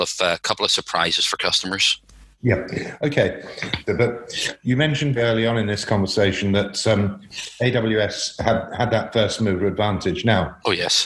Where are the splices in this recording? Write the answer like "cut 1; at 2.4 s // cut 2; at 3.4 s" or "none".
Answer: cut 1; at 3.9 s // cut 2; at 5.2 s